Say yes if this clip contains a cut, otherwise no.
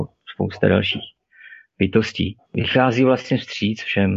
yes